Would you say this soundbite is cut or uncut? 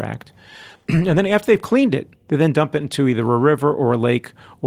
cut